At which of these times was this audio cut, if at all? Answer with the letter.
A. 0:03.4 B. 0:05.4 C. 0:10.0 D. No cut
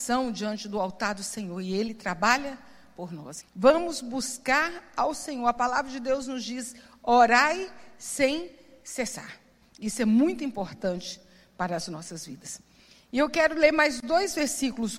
A